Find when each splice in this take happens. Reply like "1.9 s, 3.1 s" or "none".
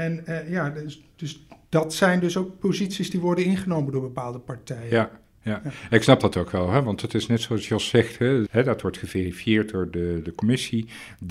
8.5 s